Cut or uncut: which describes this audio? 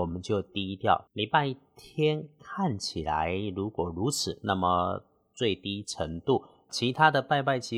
cut